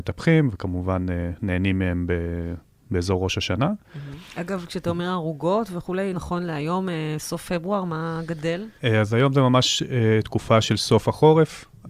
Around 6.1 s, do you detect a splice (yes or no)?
yes